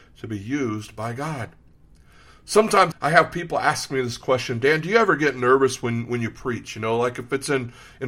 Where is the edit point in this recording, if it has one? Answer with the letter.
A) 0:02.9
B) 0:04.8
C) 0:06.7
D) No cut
A